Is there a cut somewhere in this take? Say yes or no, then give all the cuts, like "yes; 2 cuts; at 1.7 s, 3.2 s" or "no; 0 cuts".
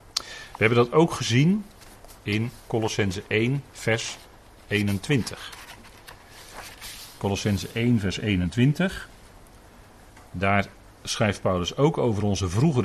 no; 0 cuts